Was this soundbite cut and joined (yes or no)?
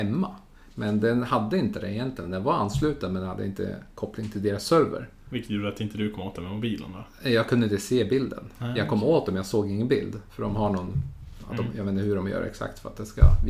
no